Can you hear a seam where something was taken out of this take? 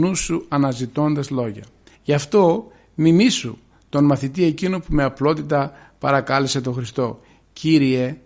yes; 1 cut; at 1.9 s

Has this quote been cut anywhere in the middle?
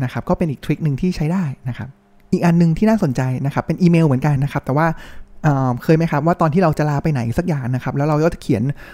yes; 1 cut; at 4.4 s

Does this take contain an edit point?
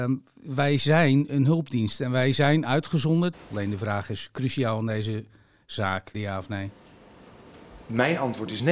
yes; 2 cuts; at 3.3 s, 6.1 s

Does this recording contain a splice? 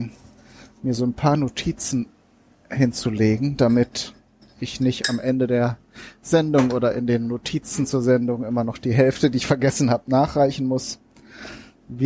no; 0 cuts

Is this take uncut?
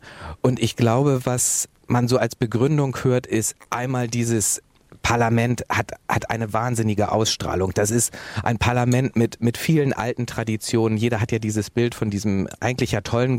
yes; 0 cuts

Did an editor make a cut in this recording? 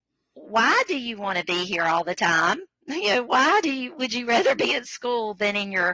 no; 0 cuts

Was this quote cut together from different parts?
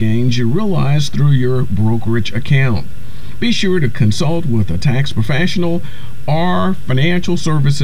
no; 0 cuts

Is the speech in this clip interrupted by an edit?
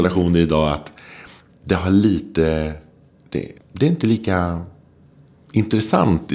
yes; 1 cut; at 3.6 s

